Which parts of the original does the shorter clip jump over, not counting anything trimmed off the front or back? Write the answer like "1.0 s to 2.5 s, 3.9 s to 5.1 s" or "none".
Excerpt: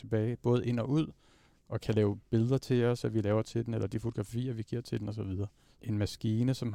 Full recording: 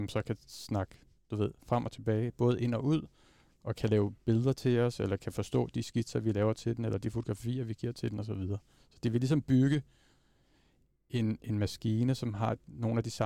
5.0 s to 6.1 s, 8.9 s to 11.4 s